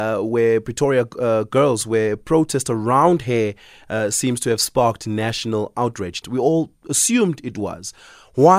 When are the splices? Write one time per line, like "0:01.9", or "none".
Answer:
0:06.2